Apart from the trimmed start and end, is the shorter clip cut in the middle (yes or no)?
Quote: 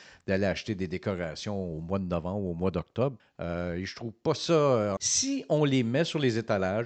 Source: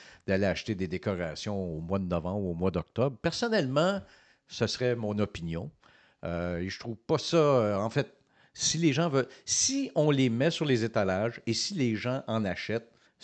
yes